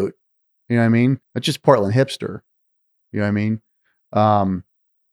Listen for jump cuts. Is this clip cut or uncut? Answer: cut